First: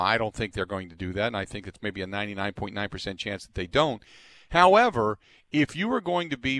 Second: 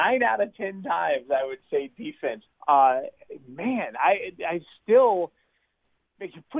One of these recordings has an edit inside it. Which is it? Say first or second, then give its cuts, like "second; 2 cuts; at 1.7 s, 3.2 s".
second; 1 cut; at 2.5 s